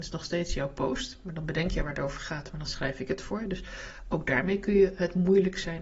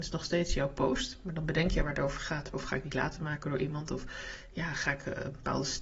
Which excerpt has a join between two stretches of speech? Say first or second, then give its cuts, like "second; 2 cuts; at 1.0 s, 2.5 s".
second; 1 cut; at 2.5 s